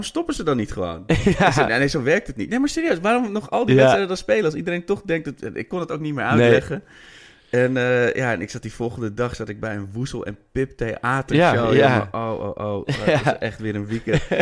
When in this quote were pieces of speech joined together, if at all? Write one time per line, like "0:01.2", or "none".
none

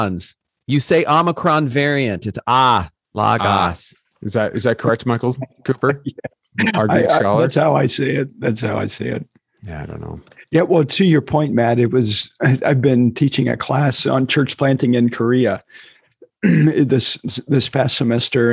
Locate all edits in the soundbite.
none

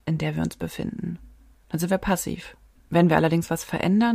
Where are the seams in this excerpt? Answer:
0:01.5

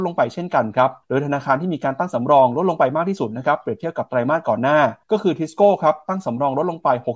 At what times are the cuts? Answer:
0:01.0
0:05.0

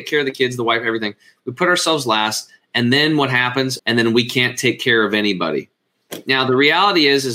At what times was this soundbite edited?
0:03.8

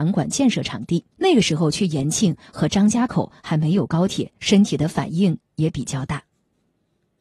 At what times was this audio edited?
0:01.1
0:04.4

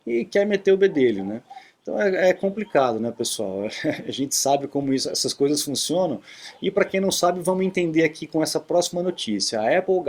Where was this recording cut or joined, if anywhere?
none

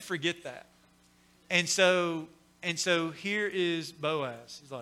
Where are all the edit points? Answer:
none

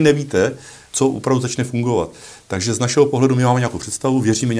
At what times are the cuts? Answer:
0:00.9

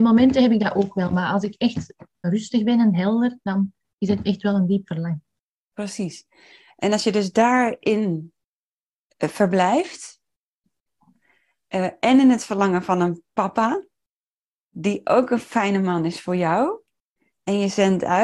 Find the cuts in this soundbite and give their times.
0:02.2

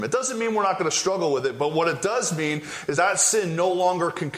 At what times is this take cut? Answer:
0:02.9

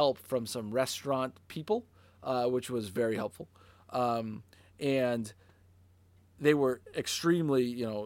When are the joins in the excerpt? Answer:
none

